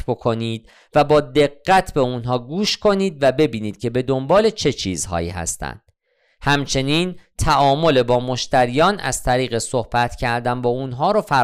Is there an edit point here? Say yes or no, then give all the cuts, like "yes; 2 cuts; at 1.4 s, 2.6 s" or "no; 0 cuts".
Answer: no; 0 cuts